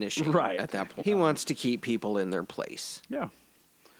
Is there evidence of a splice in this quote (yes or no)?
yes